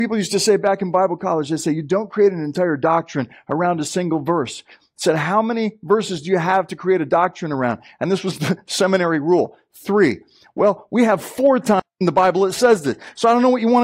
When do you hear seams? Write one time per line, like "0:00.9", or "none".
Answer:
none